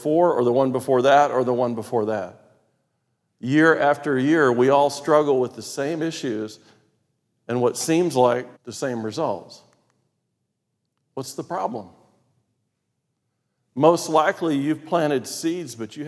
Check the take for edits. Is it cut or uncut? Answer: cut